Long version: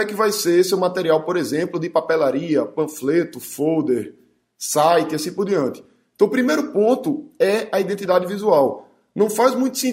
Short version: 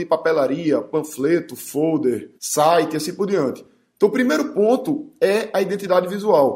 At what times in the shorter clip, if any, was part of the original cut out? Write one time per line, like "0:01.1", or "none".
0:02.4